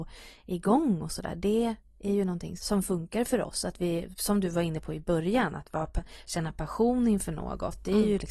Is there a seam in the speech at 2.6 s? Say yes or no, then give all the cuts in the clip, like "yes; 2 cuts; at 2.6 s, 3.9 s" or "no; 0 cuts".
yes; 1 cut; at 2.6 s